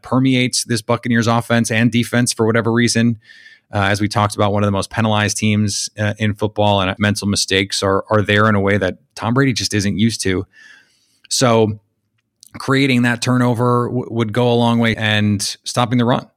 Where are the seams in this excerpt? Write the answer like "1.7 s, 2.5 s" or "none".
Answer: 7.0 s, 14.9 s

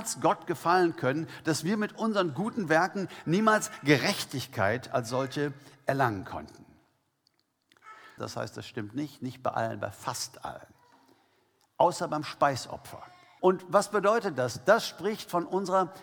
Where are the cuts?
8.2 s, 13.4 s

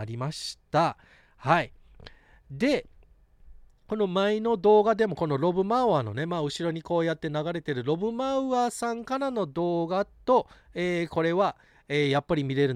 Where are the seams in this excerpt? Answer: none

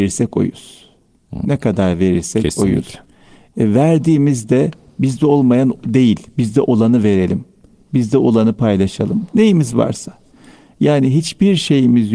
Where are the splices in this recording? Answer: none

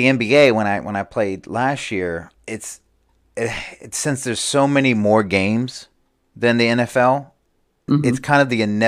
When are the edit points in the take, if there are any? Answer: 2.3 s, 7.9 s

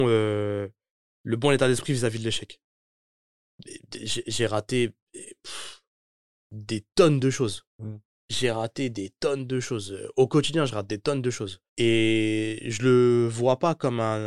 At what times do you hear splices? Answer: 11.7 s

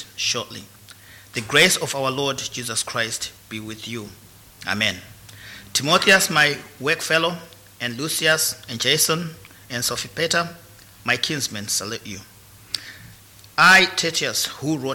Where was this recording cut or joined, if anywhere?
none

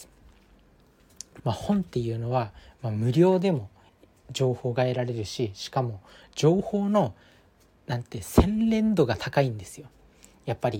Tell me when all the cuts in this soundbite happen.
1.4 s

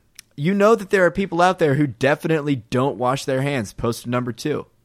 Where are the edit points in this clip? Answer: none

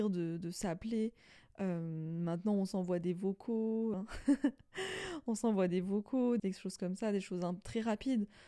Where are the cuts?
3.9 s, 6.4 s

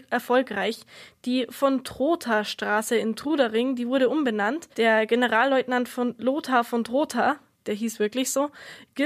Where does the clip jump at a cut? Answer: 4.7 s

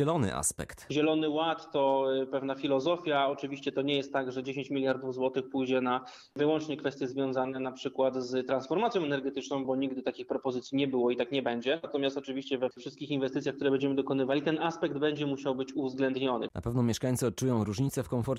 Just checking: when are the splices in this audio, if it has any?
none

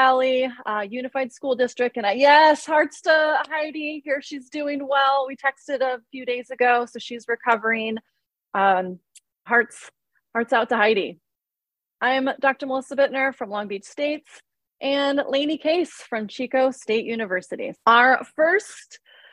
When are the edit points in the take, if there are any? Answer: 9.5 s, 17.7 s

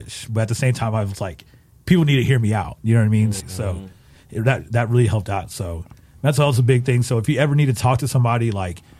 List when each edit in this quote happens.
3.4 s

